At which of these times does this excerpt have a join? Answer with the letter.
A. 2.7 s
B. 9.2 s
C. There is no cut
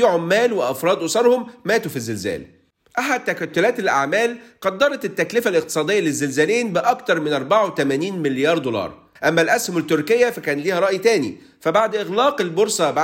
B